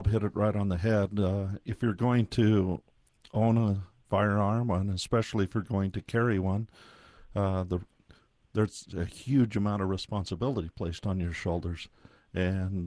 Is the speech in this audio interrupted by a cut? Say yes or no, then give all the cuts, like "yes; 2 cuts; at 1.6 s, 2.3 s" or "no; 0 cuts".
no; 0 cuts